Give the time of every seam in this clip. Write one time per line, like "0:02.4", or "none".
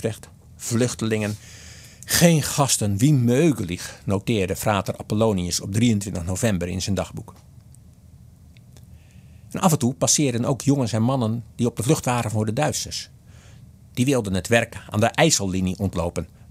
none